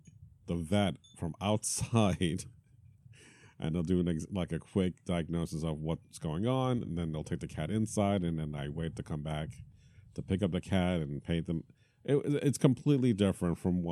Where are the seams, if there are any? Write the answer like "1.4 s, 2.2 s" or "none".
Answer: none